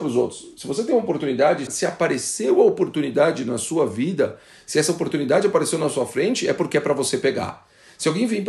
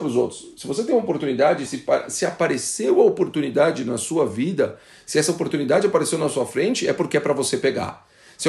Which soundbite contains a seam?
first; 1 cut; at 1.7 s

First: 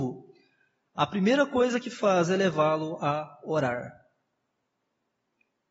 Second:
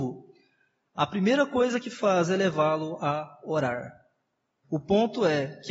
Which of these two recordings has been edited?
second; 1 cut; at 4.6 s

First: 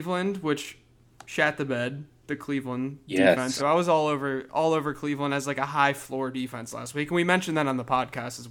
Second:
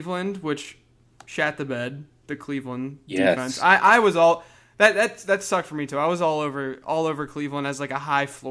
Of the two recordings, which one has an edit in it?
first; 1 cut; at 3.6 s

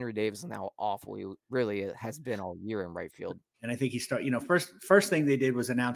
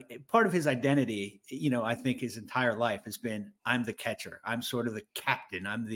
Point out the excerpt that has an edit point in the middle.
first; 2 cuts; at 1.4 s, 3.5 s

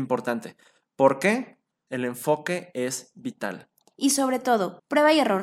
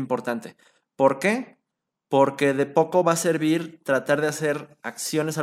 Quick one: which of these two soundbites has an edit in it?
first; 1 cut; at 1.9 s

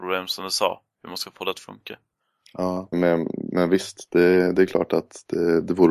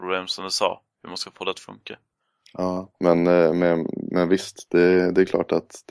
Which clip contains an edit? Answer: first; 1 cut; at 2.9 s

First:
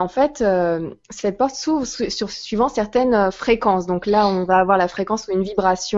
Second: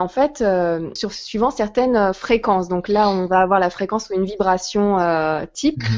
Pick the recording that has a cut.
second; 1 cut; at 1.0 s

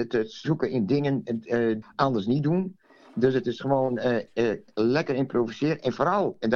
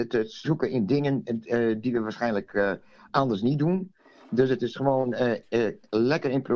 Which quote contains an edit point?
first; 1 cut; at 1.8 s

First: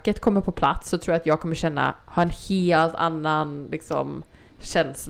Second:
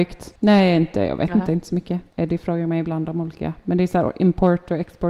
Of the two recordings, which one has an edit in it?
second; 1 cut; at 2.1 s

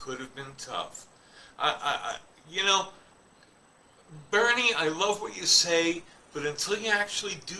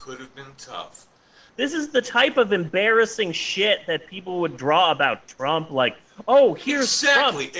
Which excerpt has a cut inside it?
second; 1 cut; at 1.5 s

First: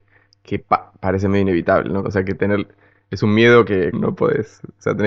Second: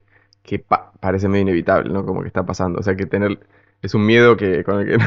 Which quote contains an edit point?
first; 2 cuts; at 2.0 s, 3.9 s

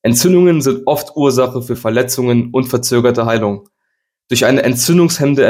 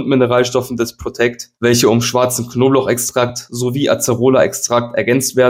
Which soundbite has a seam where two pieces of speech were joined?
second; 1 cut; at 1.5 s

